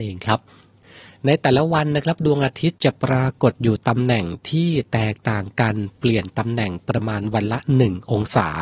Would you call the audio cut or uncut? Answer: cut